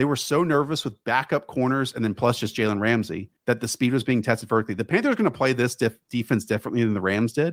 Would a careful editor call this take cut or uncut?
cut